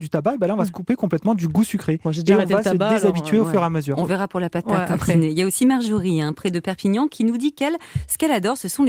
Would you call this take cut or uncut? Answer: uncut